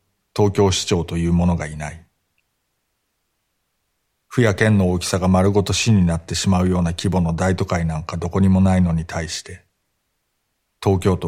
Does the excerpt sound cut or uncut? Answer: uncut